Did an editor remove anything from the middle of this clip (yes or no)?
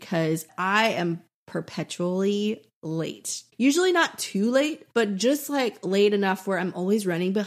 yes